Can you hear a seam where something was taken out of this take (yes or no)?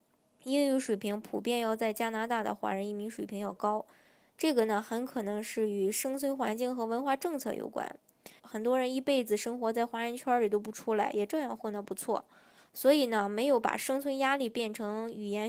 yes